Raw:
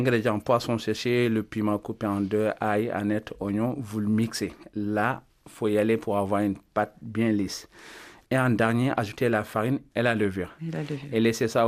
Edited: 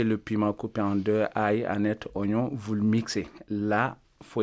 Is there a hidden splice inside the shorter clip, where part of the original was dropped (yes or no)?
no